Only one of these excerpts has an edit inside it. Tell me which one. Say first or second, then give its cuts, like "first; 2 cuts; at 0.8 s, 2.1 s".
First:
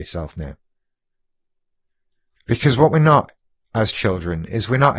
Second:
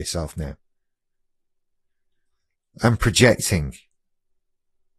first; 1 cut; at 2.4 s